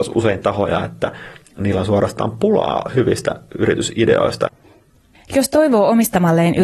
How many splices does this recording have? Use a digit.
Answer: 1